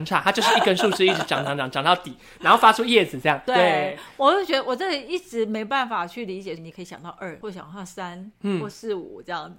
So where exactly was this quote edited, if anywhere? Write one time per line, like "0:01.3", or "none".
0:03.5
0:06.6

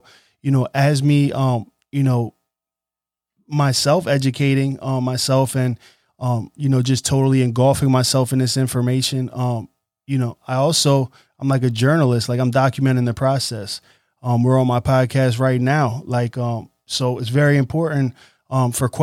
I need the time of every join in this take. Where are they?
none

